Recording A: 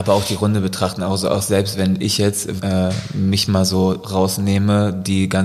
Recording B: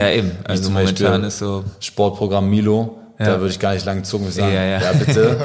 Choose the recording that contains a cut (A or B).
A